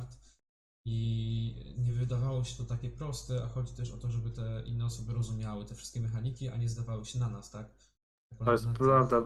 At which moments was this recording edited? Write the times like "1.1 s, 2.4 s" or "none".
none